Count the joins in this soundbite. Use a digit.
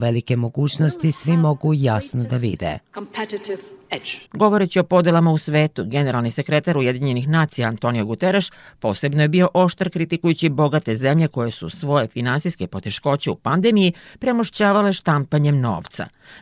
1